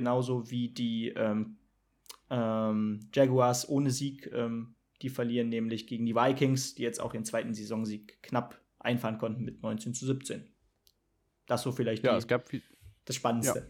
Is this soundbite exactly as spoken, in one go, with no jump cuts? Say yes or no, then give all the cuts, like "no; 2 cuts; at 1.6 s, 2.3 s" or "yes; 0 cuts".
yes; 0 cuts